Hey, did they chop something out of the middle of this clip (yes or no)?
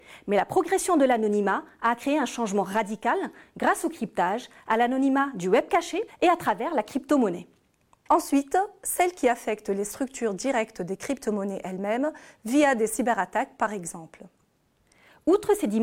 yes